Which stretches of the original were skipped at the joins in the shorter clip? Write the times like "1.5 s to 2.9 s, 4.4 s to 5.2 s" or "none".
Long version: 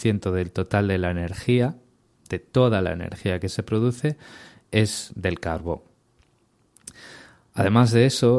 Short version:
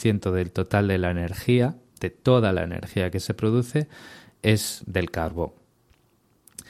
1.9 s to 2.2 s